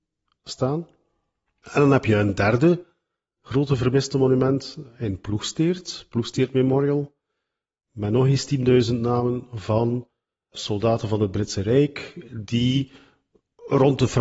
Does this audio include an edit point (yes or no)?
no